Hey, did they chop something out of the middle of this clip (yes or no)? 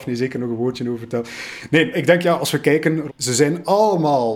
yes